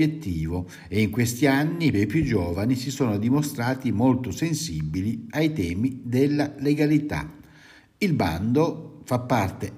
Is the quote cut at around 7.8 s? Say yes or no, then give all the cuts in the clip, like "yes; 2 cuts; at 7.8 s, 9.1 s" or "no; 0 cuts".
no; 1 cut; at 1.9 s